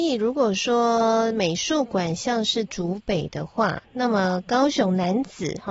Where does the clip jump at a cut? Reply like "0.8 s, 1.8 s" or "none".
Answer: none

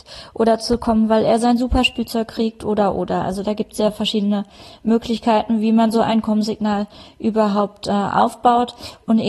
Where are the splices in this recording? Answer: none

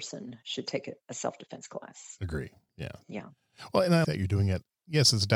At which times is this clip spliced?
4.0 s

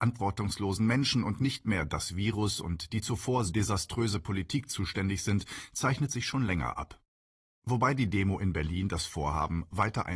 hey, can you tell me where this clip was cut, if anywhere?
3.5 s

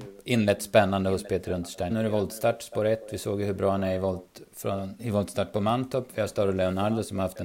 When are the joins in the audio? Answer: 1.9 s, 5.0 s

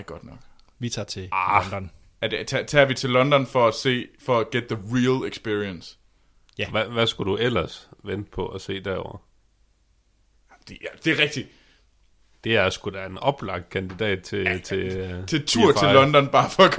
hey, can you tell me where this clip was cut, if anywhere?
none

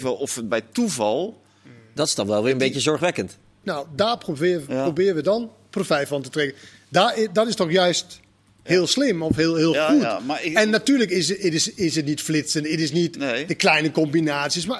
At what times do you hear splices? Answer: 3.6 s

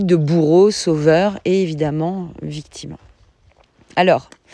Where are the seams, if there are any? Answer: none

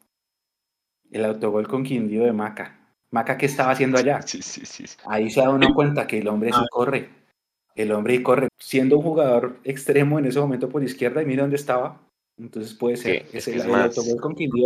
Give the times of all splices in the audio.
5.0 s, 8.5 s

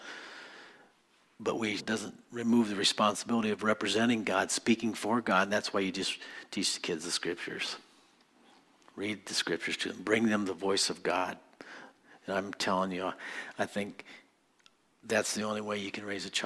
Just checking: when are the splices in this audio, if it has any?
1.8 s

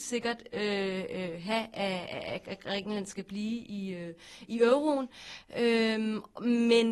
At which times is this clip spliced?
none

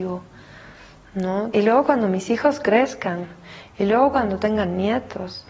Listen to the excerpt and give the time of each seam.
1.5 s, 3.6 s

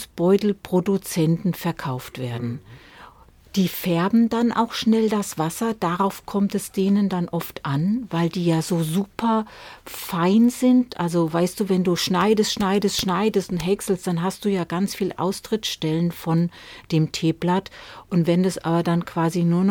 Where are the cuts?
none

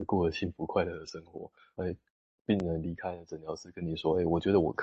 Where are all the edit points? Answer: 1.8 s

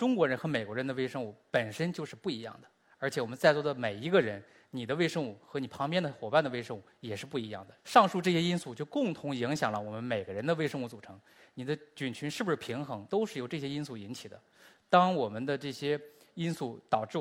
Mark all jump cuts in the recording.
7.8 s, 13.1 s

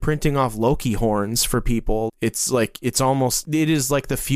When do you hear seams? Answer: 2.1 s, 3.4 s

